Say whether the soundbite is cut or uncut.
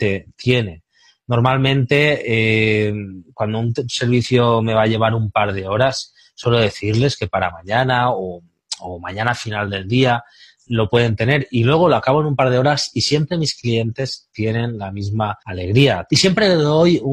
cut